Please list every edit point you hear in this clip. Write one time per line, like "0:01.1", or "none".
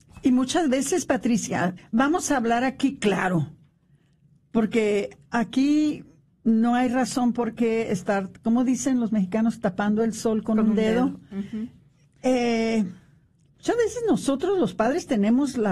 0:01.8
0:05.3

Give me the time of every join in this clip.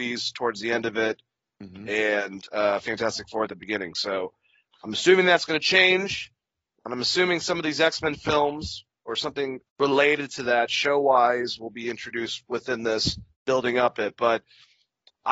0:09.6
0:13.3

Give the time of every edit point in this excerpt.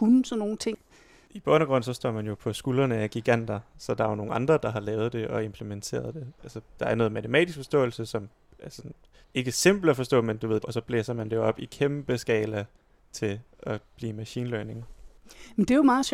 0:10.6

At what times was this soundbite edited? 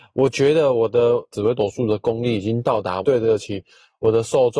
0:03.0

